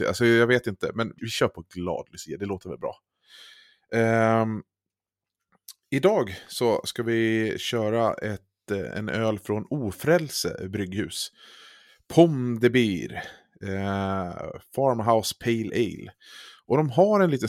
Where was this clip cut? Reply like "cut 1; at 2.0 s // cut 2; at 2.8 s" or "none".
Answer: cut 1; at 1.2 s

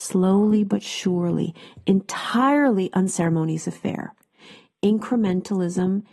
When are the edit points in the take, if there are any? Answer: none

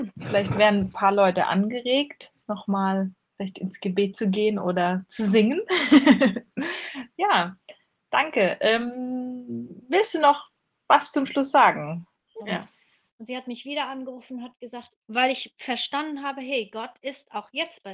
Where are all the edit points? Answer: cut 1; at 12.4 s // cut 2; at 14.9 s

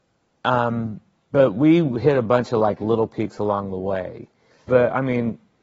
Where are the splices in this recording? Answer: cut 1; at 4.7 s

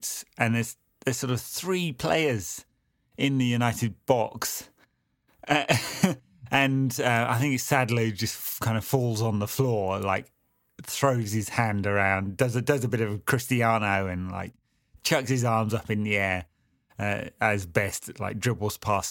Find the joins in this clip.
none

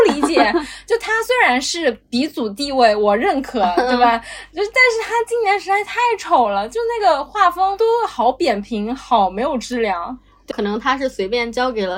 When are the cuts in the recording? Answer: cut 1; at 10.5 s

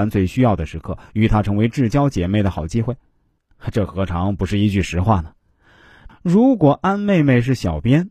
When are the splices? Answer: cut 1; at 3.4 s // cut 2; at 6.1 s

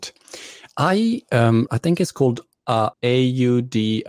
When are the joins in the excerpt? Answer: cut 1; at 1.7 s // cut 2; at 2.9 s

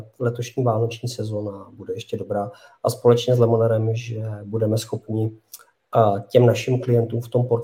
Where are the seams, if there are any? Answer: none

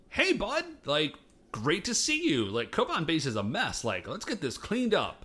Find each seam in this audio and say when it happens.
none

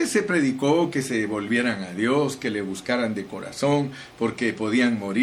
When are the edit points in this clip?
none

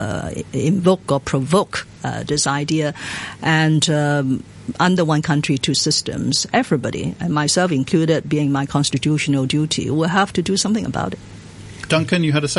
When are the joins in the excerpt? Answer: none

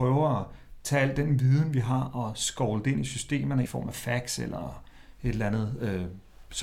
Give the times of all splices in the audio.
cut 1; at 3.6 s

